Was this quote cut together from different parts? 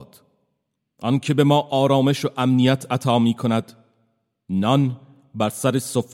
no; 0 cuts

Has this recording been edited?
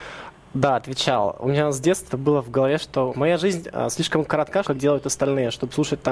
yes; 3 cuts; at 2.1 s, 3.1 s, 4.6 s

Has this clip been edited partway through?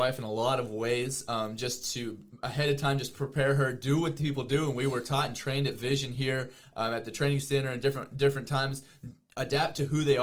no; 0 cuts

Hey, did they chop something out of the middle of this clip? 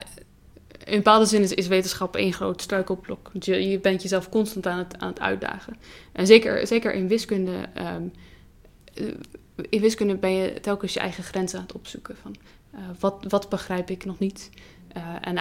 no; 0 cuts

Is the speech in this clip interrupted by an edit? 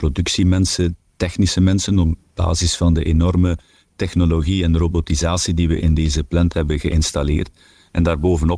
no; 0 cuts

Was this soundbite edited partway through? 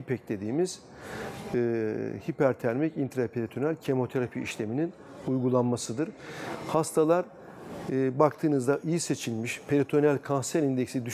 no; 0 cuts

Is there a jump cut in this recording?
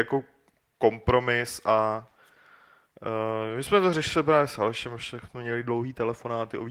no; 0 cuts

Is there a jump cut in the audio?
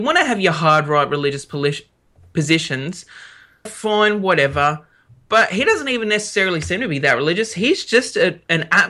yes; 1 cut; at 3.7 s

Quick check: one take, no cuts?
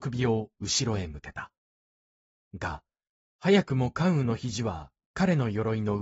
yes; 0 cuts

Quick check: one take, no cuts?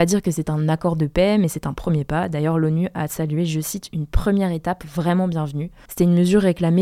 no; 1 cut; at 5.9 s

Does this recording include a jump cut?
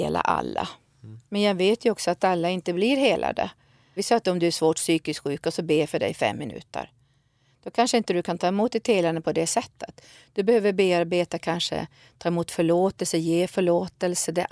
yes; 1 cut; at 4.0 s

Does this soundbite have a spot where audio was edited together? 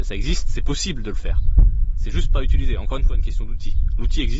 no; 0 cuts

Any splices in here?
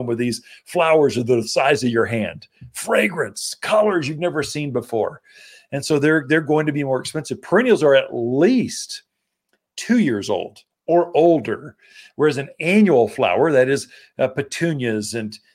no; 0 cuts

